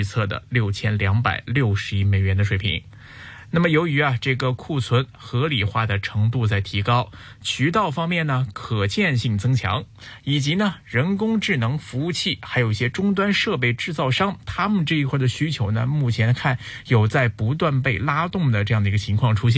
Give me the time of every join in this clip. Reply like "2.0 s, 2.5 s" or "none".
none